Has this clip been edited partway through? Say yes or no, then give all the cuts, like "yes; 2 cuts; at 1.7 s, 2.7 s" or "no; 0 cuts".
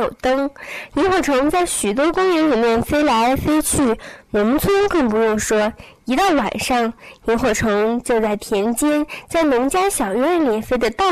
no; 0 cuts